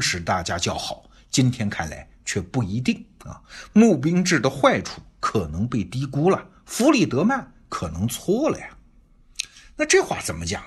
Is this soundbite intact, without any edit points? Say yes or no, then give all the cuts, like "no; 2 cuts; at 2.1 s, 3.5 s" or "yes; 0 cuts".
yes; 0 cuts